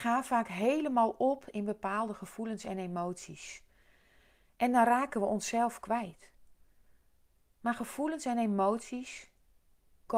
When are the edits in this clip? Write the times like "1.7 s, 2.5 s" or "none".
none